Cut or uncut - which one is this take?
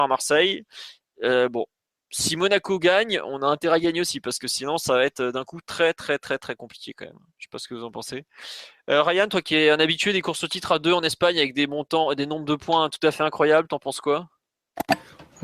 uncut